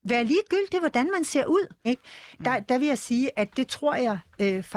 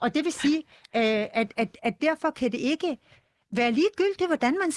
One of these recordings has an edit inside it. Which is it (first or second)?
first